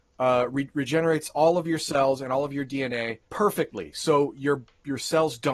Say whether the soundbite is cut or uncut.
cut